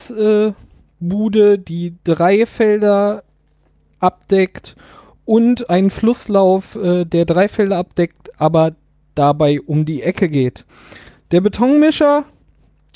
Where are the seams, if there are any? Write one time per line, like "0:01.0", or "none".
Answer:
none